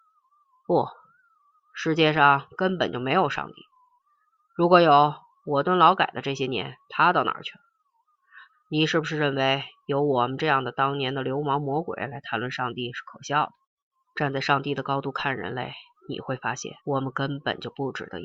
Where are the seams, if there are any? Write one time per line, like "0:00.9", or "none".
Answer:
0:08.5
0:14.1
0:16.8